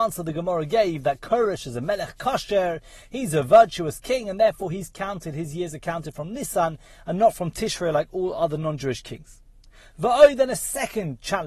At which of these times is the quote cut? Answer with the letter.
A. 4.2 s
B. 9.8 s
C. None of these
C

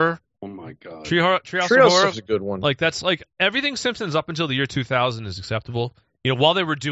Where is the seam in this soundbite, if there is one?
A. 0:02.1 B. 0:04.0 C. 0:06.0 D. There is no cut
A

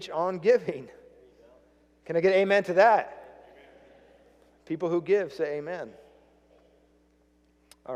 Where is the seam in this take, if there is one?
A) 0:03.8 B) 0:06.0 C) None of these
C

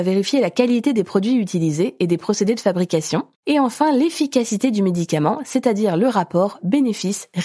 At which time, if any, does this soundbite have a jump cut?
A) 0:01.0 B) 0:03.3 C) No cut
B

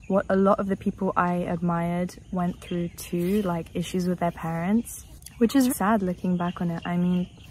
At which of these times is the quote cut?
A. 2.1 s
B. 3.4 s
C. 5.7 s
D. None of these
C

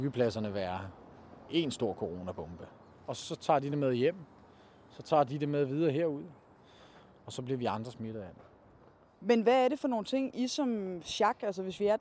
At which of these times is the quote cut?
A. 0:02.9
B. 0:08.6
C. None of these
A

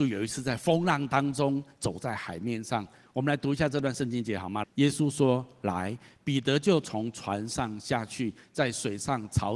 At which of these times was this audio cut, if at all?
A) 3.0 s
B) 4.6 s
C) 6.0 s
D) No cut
B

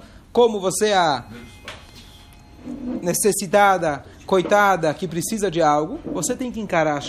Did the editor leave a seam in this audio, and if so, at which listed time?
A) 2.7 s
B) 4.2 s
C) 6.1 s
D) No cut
D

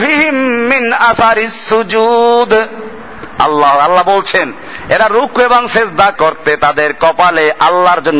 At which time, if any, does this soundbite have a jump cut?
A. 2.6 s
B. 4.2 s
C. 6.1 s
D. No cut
C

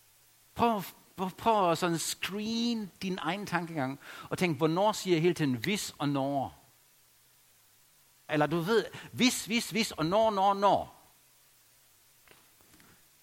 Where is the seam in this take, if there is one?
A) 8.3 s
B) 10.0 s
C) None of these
A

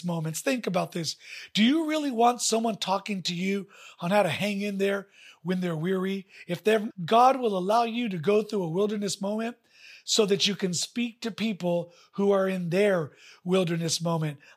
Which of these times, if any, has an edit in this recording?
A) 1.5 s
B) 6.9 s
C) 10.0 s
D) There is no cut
B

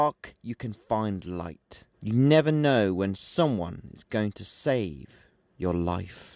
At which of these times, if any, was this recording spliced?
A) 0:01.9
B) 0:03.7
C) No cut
A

